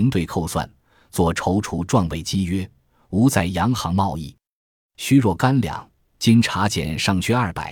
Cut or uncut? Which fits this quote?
uncut